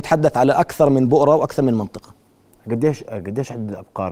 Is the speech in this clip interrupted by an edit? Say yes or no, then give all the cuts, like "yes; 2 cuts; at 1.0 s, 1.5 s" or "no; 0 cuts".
no; 0 cuts